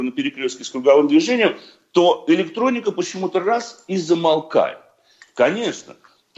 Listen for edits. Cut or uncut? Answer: uncut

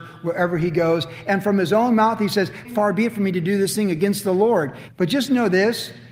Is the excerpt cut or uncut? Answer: cut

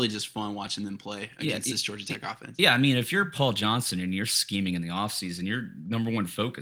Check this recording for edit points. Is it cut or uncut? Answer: uncut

